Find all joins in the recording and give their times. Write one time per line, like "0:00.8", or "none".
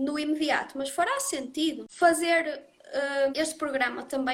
0:03.3